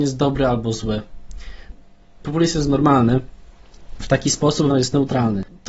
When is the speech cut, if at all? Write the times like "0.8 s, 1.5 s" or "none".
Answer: 4.7 s